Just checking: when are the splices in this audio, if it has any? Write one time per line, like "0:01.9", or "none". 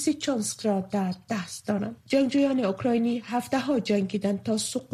none